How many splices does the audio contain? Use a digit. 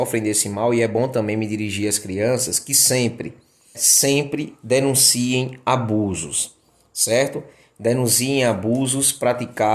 1